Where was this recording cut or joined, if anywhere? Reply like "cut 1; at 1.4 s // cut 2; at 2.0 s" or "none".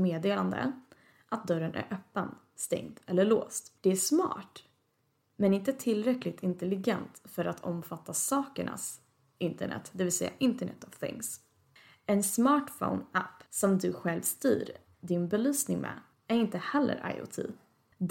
none